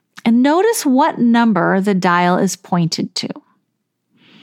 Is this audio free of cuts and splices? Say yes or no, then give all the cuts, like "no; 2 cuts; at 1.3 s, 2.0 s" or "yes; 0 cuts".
yes; 0 cuts